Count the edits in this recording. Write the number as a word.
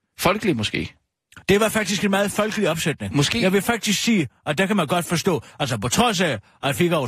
zero